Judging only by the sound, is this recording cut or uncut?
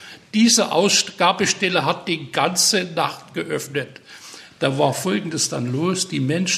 uncut